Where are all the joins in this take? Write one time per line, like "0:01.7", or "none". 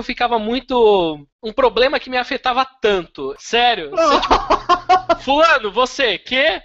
0:01.3
0:03.4